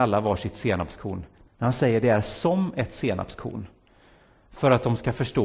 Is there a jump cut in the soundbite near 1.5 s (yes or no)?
yes